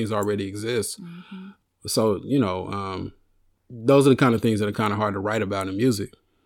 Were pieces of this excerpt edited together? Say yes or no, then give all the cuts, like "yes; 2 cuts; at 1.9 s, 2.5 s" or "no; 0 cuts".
no; 0 cuts